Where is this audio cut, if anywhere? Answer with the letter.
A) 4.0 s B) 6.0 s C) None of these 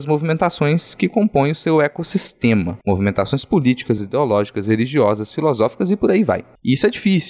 A